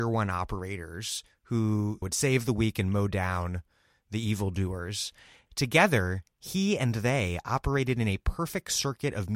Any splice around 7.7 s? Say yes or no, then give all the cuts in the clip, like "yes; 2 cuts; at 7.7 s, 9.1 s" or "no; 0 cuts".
no; 2 cuts; at 2.0 s, 5.5 s